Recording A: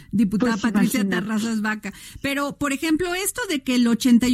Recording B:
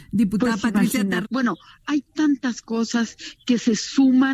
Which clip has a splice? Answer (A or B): B